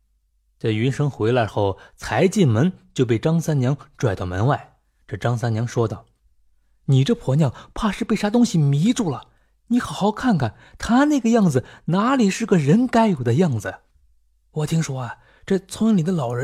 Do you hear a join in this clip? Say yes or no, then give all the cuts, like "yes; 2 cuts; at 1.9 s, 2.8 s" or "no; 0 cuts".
no; 0 cuts